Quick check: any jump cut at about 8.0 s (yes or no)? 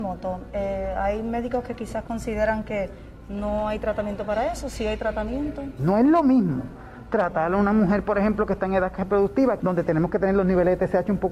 no